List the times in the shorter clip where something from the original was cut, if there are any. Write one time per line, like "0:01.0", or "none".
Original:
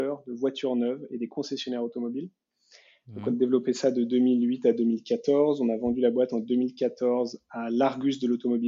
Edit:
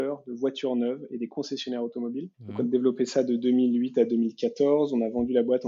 0:02.3